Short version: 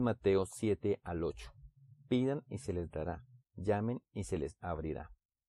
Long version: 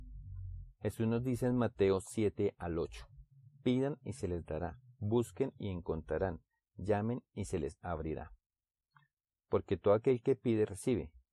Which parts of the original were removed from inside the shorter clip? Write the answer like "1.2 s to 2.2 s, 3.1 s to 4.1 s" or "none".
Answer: 5.0 s to 6.6 s